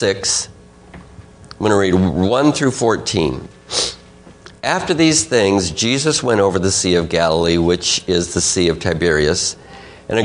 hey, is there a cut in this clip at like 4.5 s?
no; 0 cuts

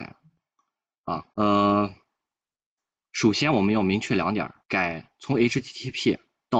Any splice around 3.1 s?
no; 2 cuts; at 1.3 s, 4.6 s

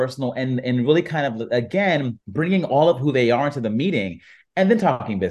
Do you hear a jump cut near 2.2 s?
yes; 1 cut; at 2.2 s

